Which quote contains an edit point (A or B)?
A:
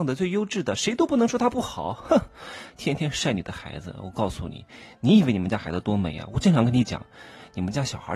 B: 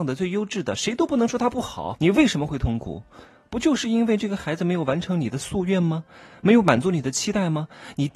B